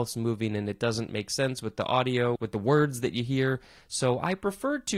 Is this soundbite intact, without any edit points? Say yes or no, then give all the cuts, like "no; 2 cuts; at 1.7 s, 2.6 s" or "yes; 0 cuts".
no; 1 cut; at 2.4 s